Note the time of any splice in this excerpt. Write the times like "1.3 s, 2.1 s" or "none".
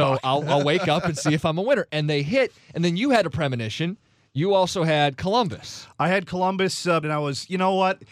7.0 s

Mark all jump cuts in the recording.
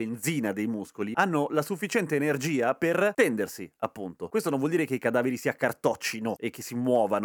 none

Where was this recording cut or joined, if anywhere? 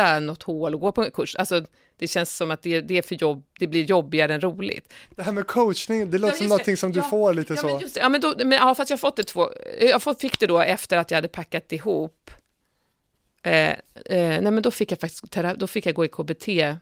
none

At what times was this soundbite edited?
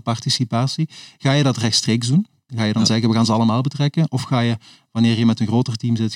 2.5 s

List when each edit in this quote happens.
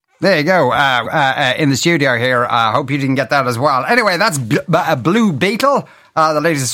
1.0 s

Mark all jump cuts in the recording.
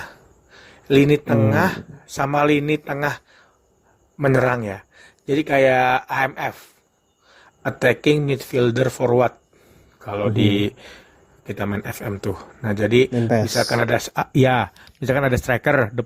none

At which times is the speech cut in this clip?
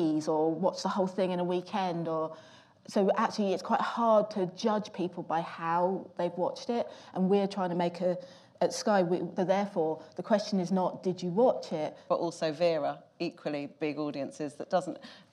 9.4 s, 12.1 s

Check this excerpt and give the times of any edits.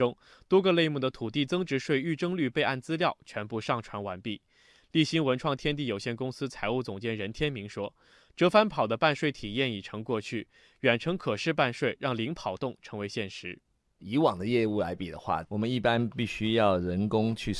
none

